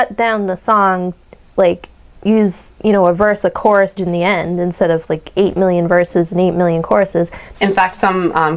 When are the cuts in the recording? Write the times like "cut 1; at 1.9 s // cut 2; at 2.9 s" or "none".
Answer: cut 1; at 4.0 s // cut 2; at 7.5 s